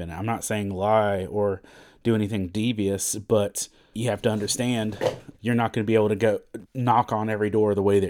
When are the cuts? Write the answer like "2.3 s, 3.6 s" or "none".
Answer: 3.9 s, 5.3 s, 6.6 s